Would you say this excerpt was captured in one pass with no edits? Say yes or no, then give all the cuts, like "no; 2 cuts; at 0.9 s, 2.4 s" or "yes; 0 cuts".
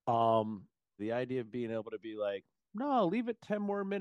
no; 1 cut; at 1.0 s